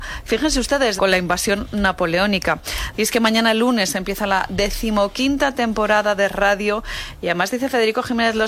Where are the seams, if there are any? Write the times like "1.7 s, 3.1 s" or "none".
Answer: 1.0 s, 2.9 s